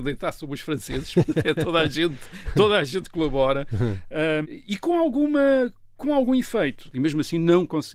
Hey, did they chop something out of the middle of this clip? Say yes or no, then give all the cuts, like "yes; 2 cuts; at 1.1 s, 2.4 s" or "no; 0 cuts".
yes; 2 cuts; at 4.4 s, 6.9 s